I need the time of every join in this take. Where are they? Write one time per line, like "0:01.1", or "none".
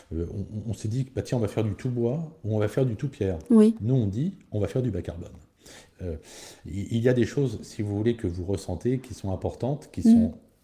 0:05.9